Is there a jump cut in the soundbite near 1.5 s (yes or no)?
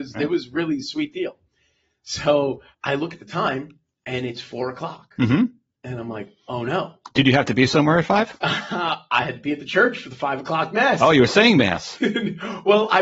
no